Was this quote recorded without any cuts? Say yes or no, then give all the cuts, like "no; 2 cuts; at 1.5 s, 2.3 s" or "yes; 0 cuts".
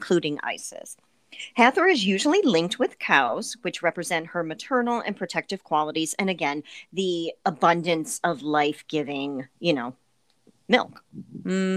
no; 1 cut; at 9.5 s